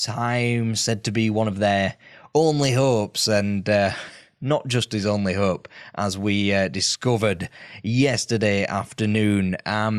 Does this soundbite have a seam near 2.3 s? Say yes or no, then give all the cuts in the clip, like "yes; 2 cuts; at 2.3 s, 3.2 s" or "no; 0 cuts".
no; 0 cuts